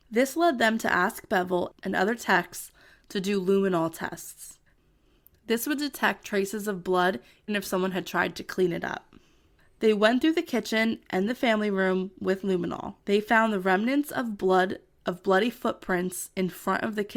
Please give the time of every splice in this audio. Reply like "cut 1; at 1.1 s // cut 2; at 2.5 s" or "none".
cut 1; at 7.5 s // cut 2; at 13.0 s